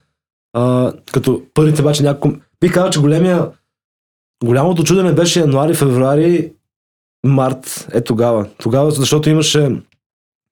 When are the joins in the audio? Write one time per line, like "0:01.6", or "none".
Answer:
none